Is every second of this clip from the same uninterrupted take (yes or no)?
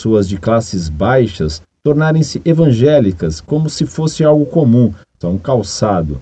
no